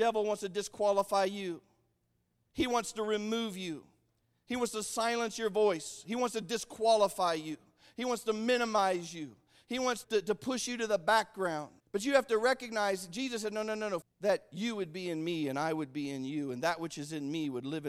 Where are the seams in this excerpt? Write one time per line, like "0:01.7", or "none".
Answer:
0:10.0
0:11.8
0:14.0